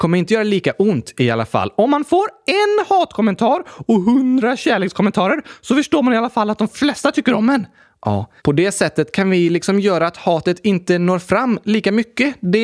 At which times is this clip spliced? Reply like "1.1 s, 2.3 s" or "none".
8.4 s